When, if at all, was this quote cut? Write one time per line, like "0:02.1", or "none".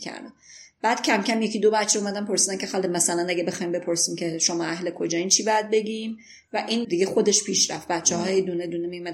0:06.8